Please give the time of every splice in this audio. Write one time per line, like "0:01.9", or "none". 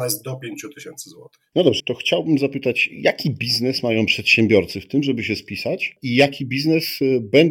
0:01.8